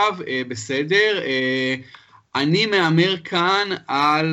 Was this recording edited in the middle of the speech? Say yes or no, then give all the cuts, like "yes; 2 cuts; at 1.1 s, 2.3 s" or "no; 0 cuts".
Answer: no; 0 cuts